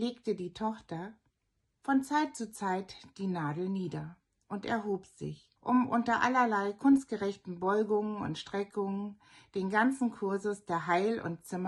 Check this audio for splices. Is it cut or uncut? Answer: cut